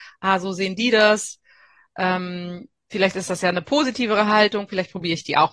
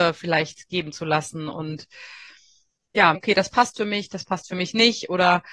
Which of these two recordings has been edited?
second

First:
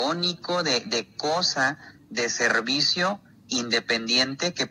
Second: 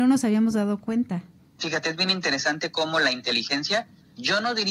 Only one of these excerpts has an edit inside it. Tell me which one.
second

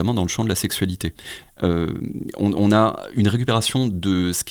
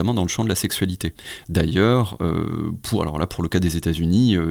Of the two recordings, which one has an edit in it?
first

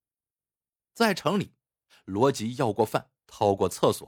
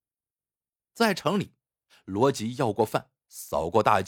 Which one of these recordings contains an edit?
first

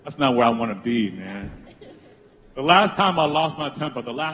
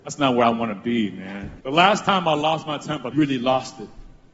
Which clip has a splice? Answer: second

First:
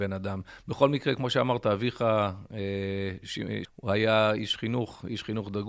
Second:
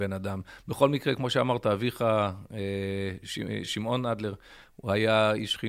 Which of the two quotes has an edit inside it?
first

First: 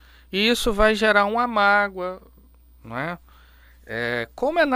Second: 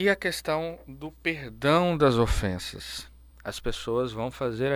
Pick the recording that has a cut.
second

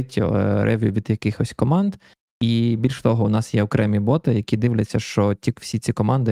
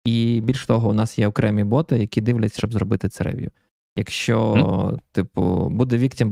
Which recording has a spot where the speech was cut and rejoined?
second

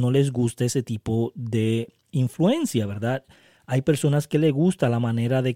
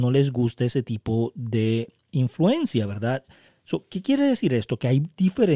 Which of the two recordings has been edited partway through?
second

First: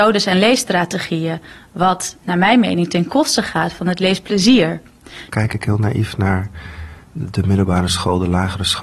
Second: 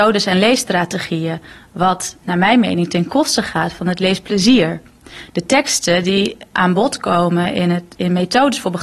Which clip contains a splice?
first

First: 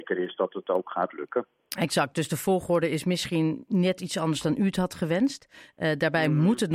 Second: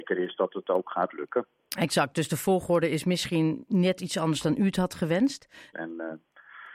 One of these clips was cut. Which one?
second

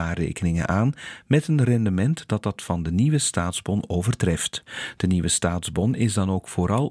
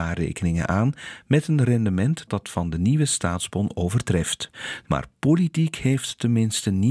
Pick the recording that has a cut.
second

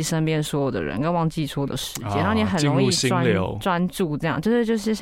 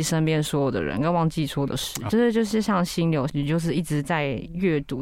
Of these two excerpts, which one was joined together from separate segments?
second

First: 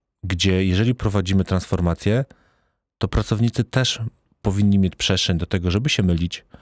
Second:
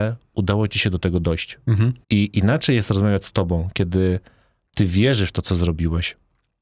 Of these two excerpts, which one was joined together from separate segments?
second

